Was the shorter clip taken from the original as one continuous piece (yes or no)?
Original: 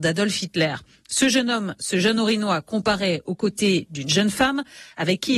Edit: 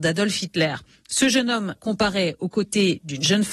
no